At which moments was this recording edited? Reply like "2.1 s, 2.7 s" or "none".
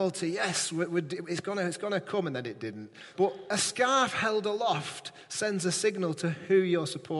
3.1 s